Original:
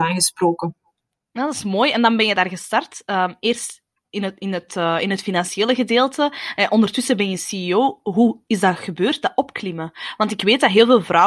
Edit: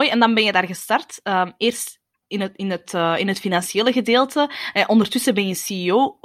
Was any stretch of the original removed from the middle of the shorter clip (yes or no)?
no